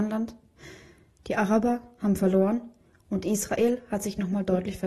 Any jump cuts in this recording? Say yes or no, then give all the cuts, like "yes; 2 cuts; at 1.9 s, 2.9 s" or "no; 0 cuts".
yes; 1 cut; at 1.1 s